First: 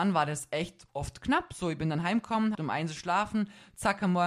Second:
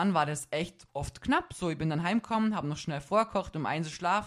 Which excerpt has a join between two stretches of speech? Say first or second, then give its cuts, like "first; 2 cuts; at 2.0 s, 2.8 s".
first; 1 cut; at 2.5 s